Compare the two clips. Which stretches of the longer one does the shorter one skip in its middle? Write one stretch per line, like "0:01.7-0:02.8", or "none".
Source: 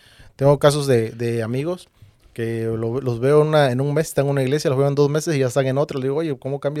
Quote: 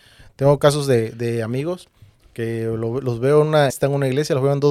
0:03.7-0:04.0